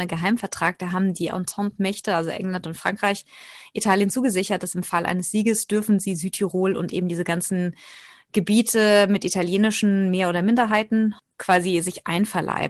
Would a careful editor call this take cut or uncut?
uncut